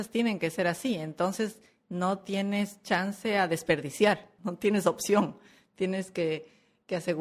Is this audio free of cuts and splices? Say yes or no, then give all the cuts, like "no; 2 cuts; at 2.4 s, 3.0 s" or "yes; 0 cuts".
no; 1 cut; at 4.4 s